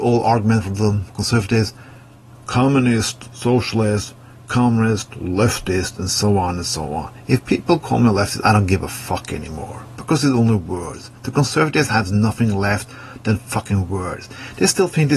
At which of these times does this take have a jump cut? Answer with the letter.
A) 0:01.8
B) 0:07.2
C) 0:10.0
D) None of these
D